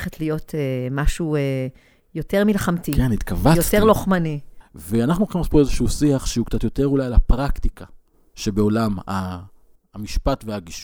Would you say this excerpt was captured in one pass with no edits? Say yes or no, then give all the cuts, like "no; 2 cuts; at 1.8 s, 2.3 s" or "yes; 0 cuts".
no; 1 cut; at 4.6 s